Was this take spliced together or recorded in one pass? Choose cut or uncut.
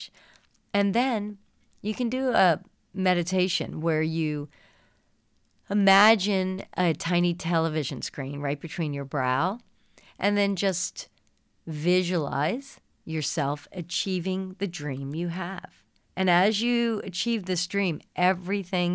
uncut